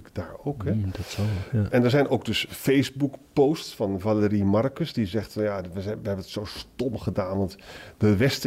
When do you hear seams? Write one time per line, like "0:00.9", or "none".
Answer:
none